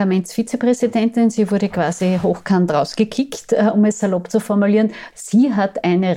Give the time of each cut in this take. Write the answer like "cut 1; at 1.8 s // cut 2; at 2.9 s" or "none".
cut 1; at 5.1 s